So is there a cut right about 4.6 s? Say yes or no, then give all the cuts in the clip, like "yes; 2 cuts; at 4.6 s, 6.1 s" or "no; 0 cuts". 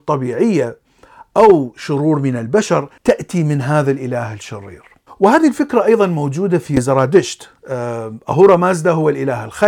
no; 1 cut; at 3.0 s